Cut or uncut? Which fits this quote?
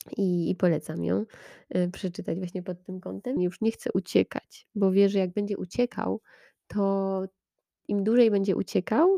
cut